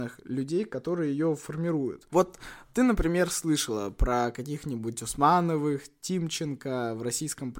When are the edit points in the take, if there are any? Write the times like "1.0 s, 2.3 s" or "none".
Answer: none